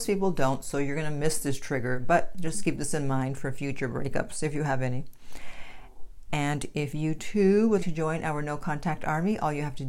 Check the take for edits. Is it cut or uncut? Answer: cut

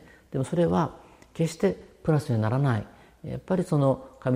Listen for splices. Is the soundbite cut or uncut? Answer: uncut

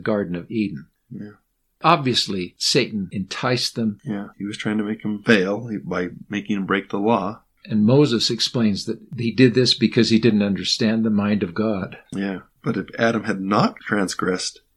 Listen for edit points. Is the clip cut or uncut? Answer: uncut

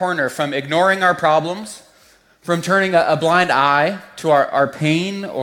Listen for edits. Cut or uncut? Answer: uncut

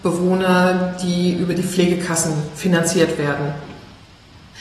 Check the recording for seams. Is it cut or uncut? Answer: uncut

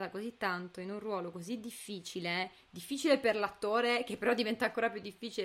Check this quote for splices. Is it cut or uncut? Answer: uncut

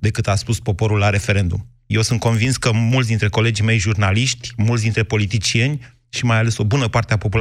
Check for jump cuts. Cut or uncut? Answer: cut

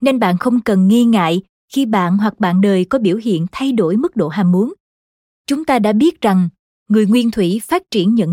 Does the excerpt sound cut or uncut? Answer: cut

